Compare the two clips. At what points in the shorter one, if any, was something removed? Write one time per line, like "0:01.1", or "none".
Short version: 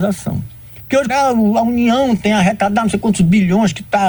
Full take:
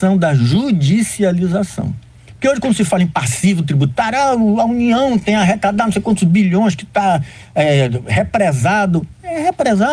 0:01.1